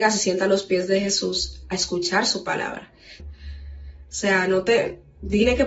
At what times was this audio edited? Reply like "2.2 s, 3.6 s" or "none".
3.2 s

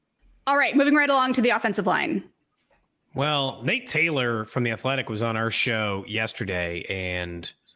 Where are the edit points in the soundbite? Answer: none

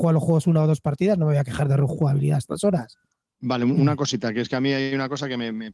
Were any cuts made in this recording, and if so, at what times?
none

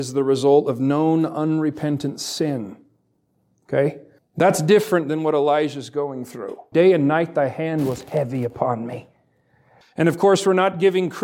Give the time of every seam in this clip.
4.2 s, 6.7 s, 9.8 s

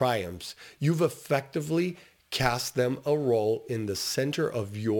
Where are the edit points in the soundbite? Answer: none

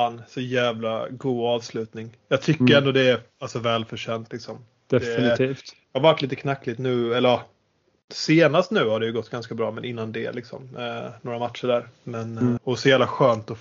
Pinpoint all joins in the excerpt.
12.6 s

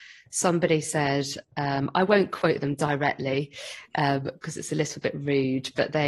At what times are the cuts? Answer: none

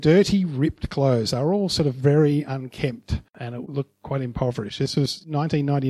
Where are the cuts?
3.3 s

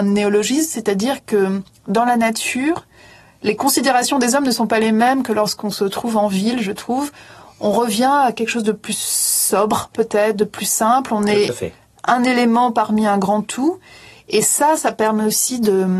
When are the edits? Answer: none

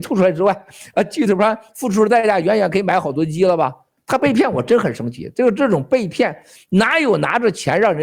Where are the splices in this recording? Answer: 4.0 s

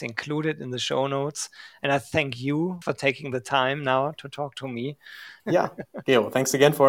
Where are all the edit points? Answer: 2.8 s, 5.4 s

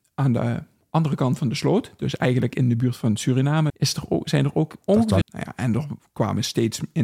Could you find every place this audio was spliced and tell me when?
3.7 s, 5.2 s

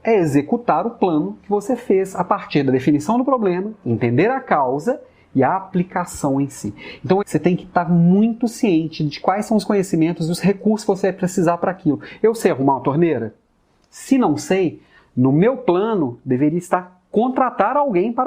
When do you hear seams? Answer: 7.2 s

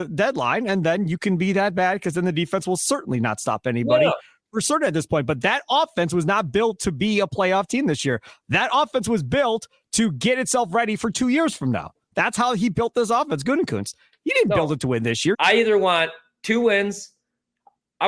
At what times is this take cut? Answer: 15.3 s

